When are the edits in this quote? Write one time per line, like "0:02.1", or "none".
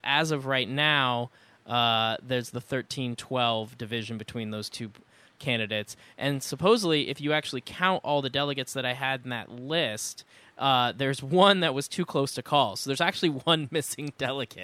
none